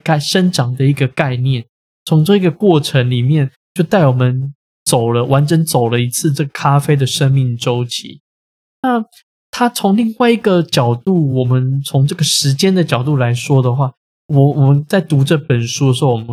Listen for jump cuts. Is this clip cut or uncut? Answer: uncut